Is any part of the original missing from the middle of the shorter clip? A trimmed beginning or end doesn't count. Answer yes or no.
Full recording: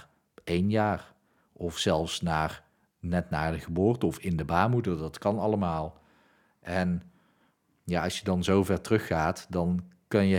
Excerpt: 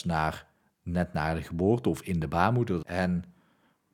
yes